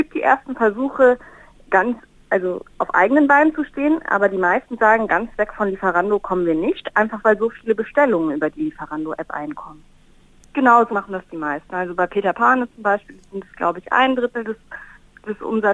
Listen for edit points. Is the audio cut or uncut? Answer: cut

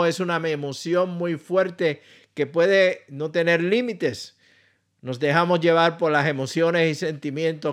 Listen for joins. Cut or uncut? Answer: uncut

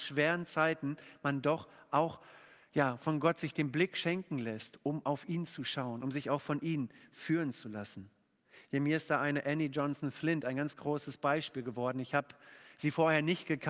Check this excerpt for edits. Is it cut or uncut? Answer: uncut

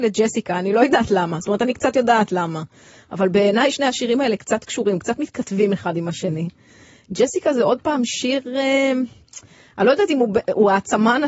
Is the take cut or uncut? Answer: uncut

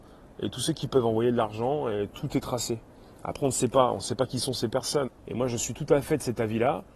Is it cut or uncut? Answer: cut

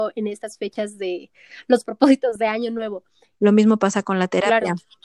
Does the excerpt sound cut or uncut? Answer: cut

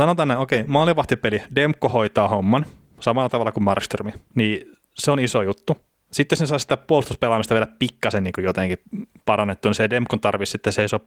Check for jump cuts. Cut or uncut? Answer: uncut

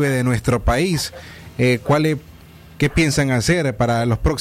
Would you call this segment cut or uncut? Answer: uncut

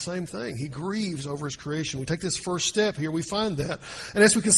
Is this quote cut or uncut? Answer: uncut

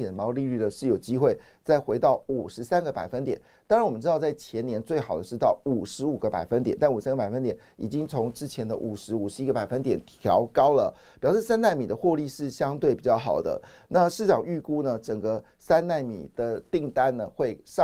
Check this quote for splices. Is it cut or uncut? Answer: uncut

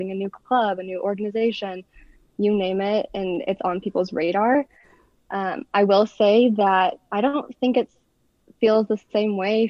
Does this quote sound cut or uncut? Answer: uncut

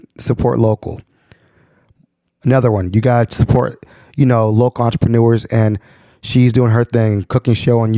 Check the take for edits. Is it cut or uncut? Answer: cut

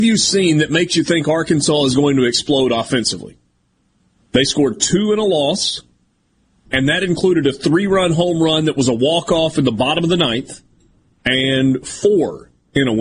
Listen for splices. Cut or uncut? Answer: cut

